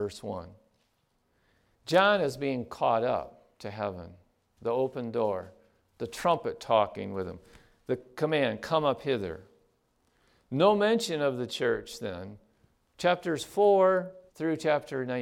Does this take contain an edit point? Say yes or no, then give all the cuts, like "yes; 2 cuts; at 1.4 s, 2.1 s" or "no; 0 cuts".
yes; 1 cut; at 14.3 s